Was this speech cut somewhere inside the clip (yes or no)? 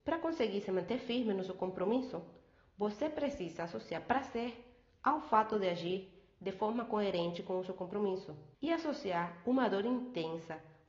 yes